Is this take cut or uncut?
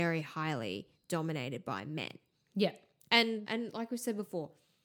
cut